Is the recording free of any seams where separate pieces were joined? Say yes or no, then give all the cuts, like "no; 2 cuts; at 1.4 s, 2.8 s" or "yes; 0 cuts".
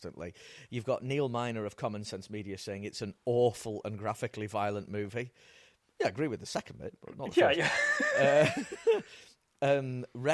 yes; 0 cuts